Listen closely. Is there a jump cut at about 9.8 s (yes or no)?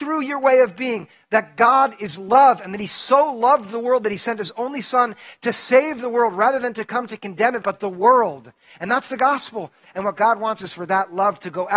no